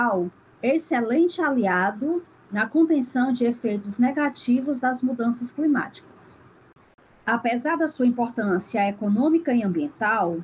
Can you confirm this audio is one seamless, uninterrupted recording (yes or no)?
yes